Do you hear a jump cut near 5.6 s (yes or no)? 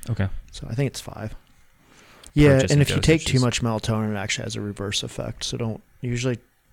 no